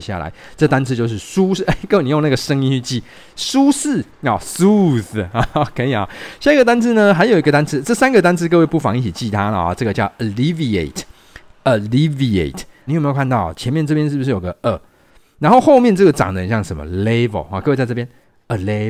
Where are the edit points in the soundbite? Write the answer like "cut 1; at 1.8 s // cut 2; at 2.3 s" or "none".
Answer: cut 1; at 12.9 s